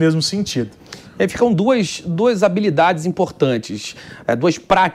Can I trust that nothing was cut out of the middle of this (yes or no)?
yes